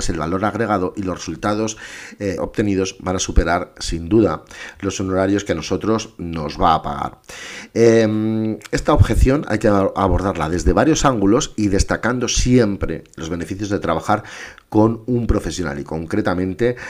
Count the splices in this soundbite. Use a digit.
1